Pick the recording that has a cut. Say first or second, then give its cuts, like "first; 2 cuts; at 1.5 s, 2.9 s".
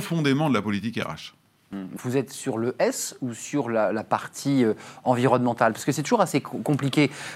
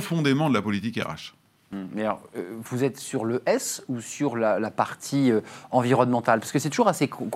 first; 1 cut; at 2.0 s